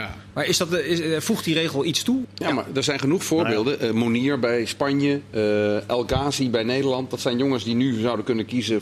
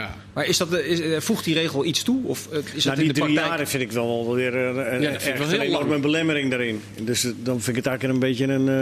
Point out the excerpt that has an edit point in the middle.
first; 1 cut; at 2.2 s

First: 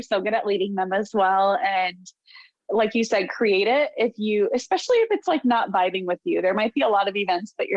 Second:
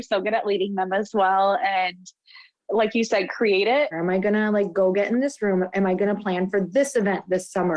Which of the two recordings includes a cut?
second; 1 cut; at 3.9 s

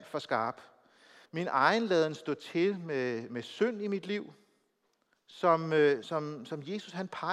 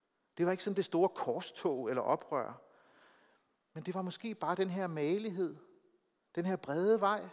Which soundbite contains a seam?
first; 2 cuts; at 1.3 s, 6.0 s

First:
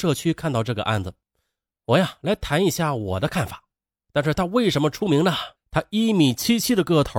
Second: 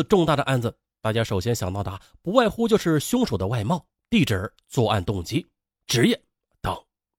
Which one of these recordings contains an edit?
first; 2 cuts; at 4.0 s, 5.5 s

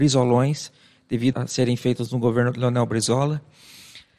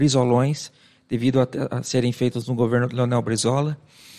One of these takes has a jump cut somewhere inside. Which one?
first; 1 cut; at 1.3 s

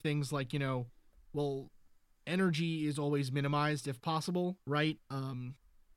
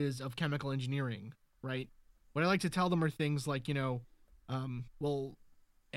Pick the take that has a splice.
first; 2 cuts; at 1.3 s, 4.6 s

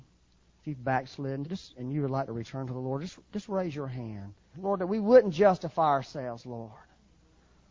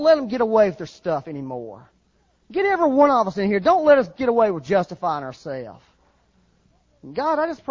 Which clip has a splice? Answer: first; 2 cuts; at 1.4 s, 4.5 s

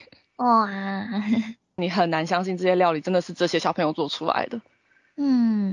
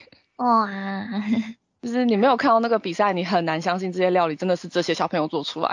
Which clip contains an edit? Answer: first; 1 cut; at 1.8 s

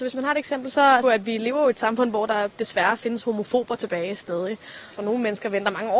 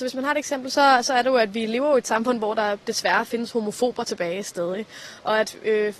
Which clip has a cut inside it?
first; 2 cuts; at 1.0 s, 4.9 s

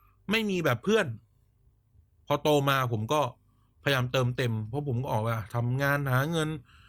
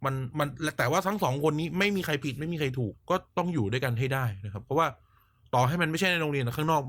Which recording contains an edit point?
second; 1 cut; at 2.9 s

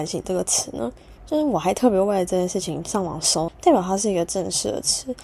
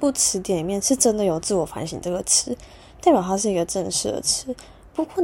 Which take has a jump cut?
first; 2 cuts; at 1.2 s, 3.5 s

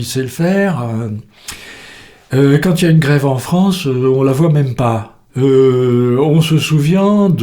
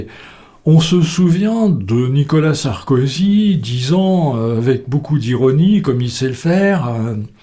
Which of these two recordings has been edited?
first; 1 cut; at 5.3 s

